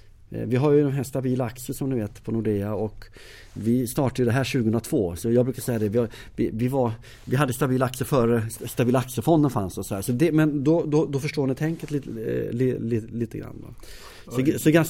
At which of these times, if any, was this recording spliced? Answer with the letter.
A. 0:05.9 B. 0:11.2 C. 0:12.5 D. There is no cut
D